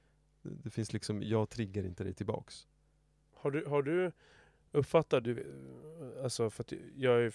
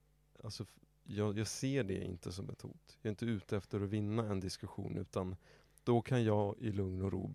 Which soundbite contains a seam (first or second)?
first